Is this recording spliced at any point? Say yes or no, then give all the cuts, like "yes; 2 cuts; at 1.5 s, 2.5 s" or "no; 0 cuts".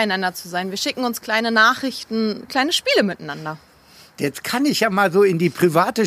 yes; 2 cuts; at 2.5 s, 4.2 s